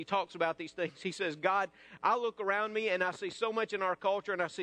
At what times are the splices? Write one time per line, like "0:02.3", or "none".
none